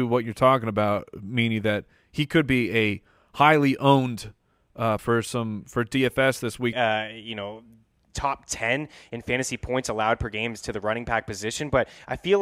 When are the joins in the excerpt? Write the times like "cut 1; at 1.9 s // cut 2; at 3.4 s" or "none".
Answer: cut 1; at 5.0 s // cut 2; at 6.7 s